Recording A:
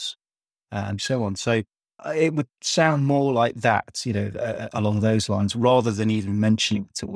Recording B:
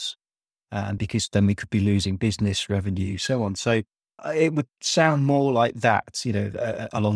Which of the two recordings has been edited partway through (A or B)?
A